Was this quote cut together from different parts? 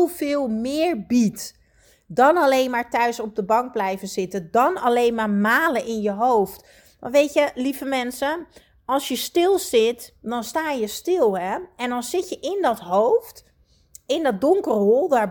no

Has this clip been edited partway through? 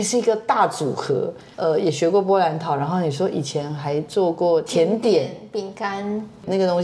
yes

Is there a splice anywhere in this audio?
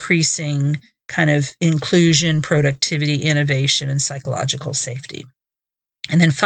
no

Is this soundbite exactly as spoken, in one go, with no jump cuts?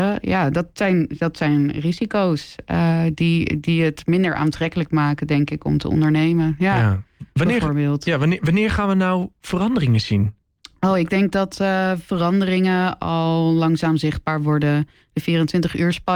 yes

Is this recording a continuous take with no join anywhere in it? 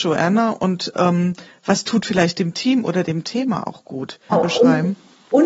no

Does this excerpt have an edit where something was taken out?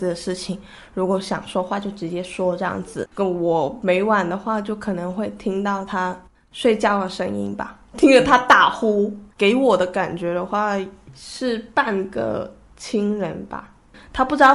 yes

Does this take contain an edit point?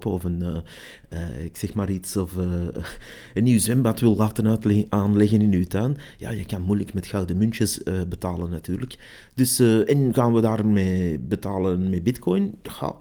no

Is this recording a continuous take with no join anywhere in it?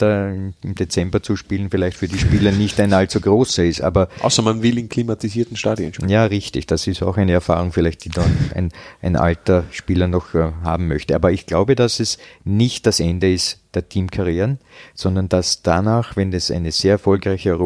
yes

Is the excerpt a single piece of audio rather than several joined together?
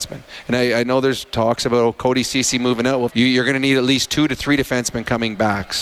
no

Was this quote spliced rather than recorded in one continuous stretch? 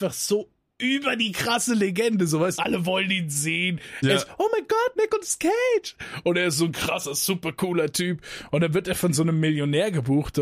yes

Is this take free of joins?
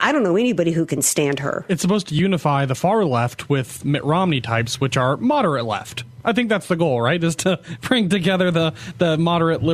yes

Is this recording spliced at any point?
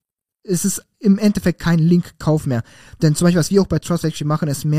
no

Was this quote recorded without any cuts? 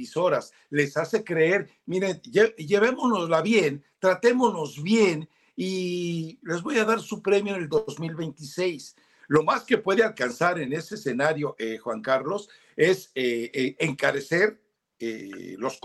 yes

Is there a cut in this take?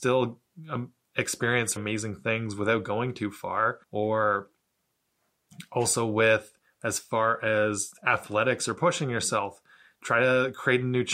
yes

